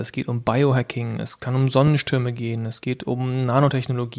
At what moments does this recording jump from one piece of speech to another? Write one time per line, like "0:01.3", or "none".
none